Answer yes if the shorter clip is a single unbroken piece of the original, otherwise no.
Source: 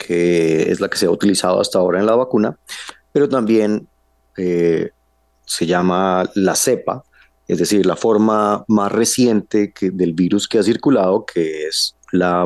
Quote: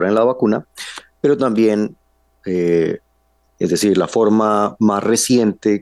no